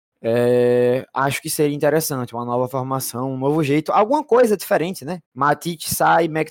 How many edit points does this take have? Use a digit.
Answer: 1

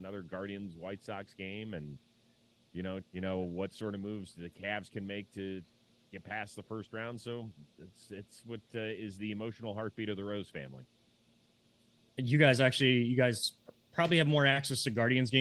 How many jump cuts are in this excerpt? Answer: 1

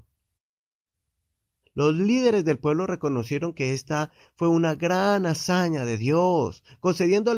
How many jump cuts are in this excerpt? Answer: 1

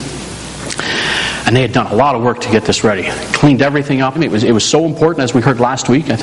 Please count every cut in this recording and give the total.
1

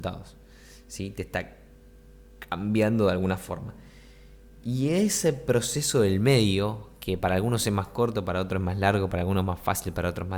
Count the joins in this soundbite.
0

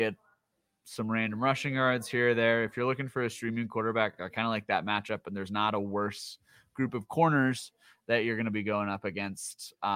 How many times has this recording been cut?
0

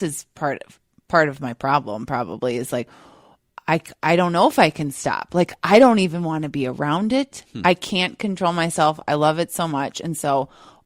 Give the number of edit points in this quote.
0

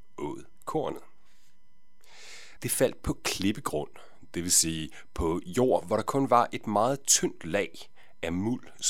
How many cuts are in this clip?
1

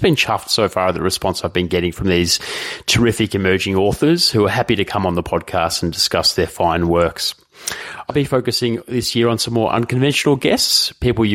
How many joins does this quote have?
1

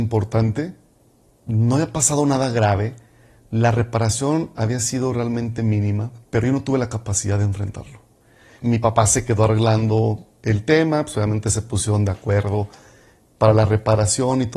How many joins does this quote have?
2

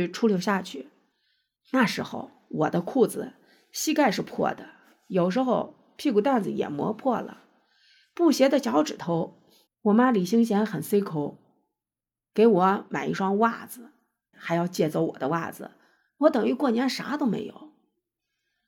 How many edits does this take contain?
3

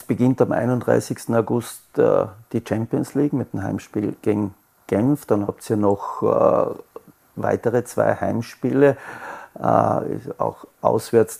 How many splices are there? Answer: 0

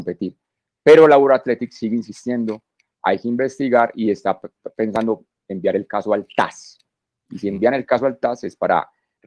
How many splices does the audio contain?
0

